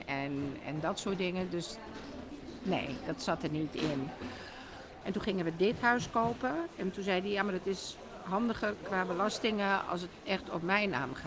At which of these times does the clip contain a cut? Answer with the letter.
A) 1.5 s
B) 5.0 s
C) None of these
B